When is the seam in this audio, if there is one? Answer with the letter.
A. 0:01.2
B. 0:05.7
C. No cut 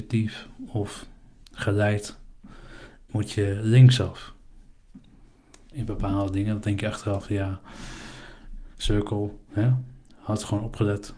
B